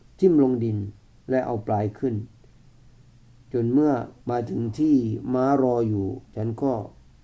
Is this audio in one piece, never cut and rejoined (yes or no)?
no